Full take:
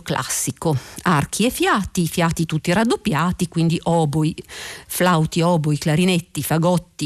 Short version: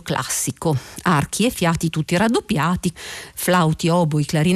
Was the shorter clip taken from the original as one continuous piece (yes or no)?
no